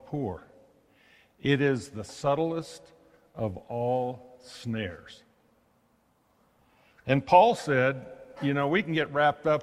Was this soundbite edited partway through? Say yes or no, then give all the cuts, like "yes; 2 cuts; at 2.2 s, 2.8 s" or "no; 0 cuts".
no; 0 cuts